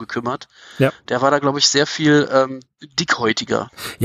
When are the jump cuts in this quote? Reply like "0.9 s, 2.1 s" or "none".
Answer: none